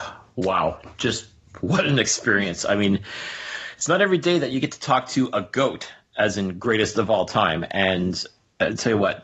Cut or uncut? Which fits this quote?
uncut